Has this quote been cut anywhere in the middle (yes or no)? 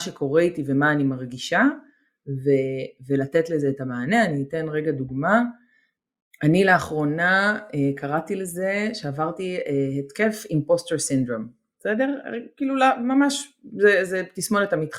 no